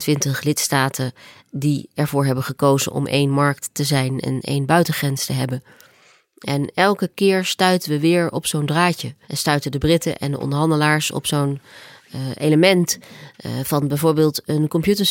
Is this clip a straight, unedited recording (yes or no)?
no